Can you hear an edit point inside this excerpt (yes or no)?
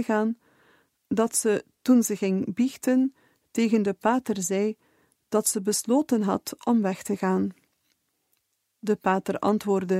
no